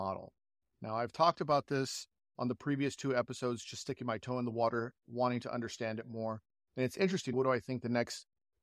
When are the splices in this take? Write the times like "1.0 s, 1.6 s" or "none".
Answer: 7.3 s